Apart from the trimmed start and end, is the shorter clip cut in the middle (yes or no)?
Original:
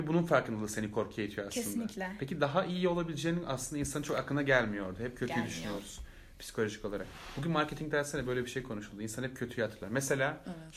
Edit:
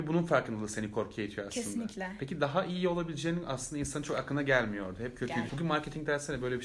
yes